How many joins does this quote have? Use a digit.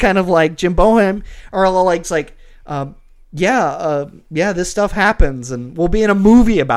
1